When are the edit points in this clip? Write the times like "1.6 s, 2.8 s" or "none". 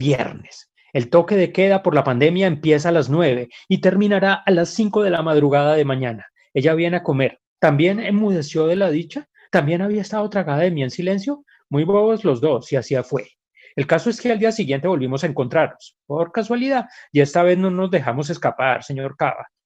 7.5 s